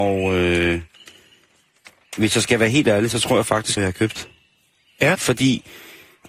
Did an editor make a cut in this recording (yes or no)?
yes